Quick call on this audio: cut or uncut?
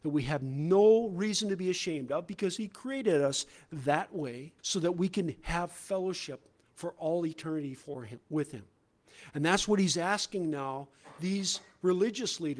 cut